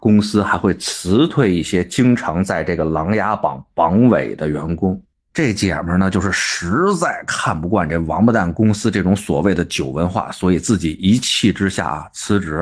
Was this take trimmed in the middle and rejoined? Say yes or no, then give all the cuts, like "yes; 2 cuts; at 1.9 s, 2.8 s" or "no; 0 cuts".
no; 0 cuts